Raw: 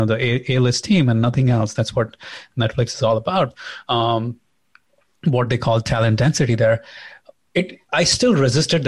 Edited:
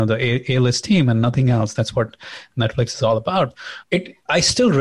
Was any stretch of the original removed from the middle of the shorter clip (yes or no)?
yes